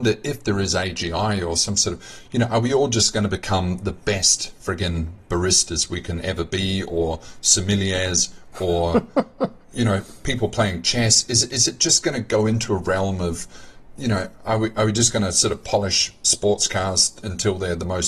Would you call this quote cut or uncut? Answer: uncut